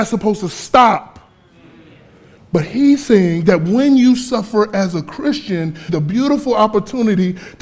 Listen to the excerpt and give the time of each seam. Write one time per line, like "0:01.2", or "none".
0:02.4
0:05.9